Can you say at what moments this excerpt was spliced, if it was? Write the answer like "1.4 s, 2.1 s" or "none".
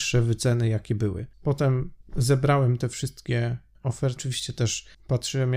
1.3 s